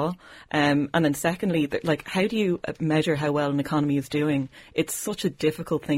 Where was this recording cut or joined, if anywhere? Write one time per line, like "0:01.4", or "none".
none